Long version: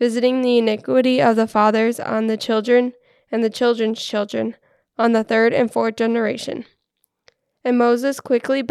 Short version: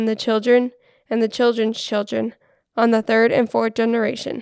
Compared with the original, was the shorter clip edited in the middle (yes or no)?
no